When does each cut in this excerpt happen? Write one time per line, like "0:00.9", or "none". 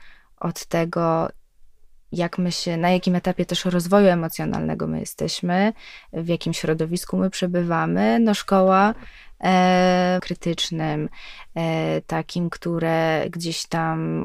0:10.2